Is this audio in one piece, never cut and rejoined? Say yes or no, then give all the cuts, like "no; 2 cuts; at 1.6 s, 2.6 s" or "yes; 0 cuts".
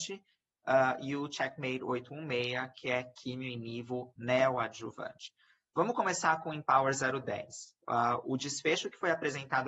yes; 0 cuts